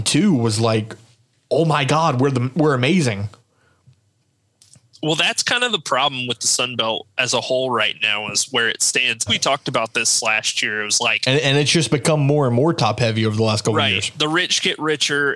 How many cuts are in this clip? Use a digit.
1